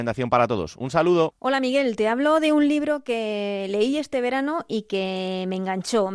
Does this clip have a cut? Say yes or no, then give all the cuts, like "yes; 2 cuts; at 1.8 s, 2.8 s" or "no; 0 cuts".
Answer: no; 0 cuts